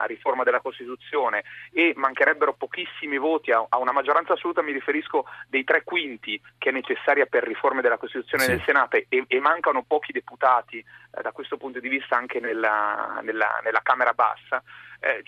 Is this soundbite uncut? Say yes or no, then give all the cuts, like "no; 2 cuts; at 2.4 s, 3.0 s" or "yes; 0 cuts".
yes; 0 cuts